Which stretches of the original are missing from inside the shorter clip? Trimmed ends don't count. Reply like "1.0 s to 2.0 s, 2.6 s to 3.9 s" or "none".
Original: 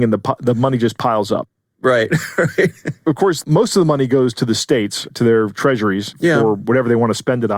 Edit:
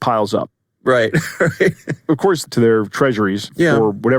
3.4 s to 5.1 s